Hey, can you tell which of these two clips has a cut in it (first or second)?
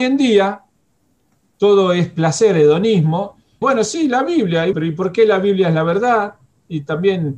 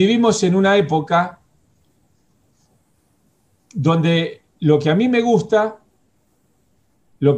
first